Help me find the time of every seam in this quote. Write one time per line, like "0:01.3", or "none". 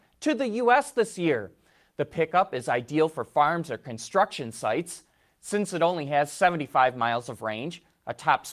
none